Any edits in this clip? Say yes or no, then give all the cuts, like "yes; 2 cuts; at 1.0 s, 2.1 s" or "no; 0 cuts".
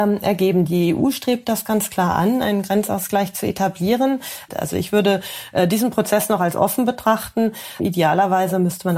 yes; 2 cuts; at 4.5 s, 7.8 s